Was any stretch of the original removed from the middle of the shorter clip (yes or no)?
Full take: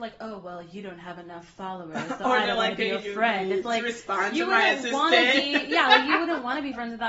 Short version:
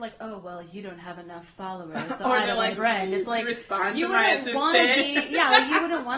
yes